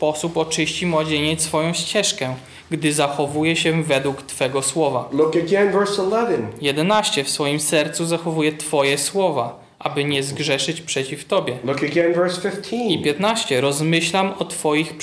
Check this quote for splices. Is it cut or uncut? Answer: uncut